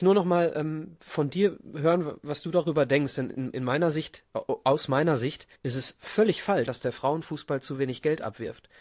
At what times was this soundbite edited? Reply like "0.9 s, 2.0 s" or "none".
5.6 s, 6.7 s

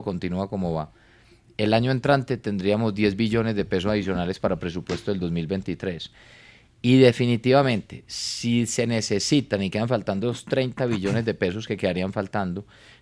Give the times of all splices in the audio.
none

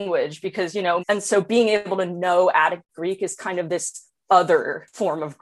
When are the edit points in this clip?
1.0 s

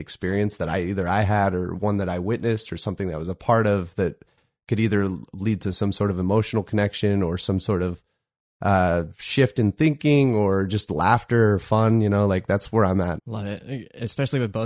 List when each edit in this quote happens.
13.2 s

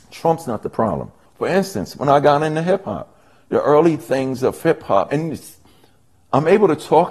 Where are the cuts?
1.3 s

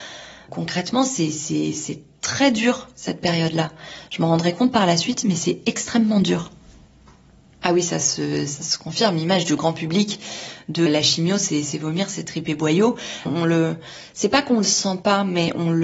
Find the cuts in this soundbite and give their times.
10.9 s, 13.3 s

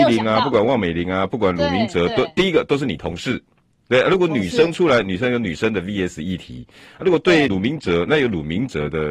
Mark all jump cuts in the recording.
7.5 s

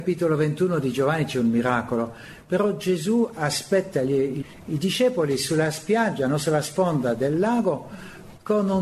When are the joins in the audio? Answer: none

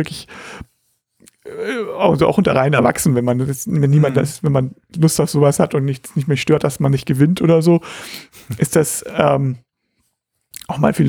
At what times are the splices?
none

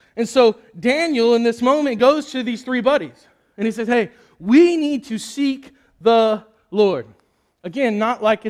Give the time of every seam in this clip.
none

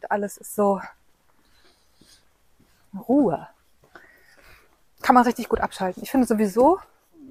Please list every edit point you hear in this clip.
none

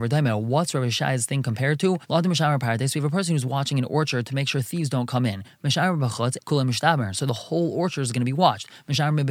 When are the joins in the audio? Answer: 6.4 s

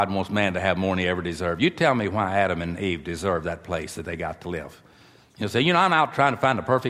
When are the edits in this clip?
none

